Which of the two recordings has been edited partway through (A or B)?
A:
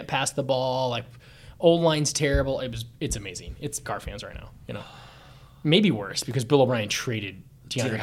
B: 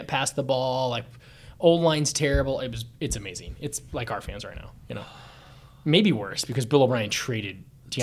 A